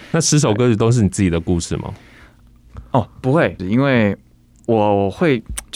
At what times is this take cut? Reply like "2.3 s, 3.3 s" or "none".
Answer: 3.6 s